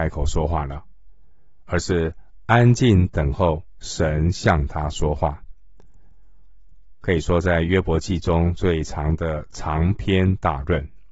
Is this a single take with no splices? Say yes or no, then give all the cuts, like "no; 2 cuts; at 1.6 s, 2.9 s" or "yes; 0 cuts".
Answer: no; 1 cut; at 7.0 s